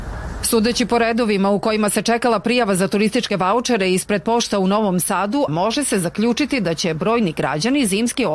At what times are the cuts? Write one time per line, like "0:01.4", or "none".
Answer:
0:05.5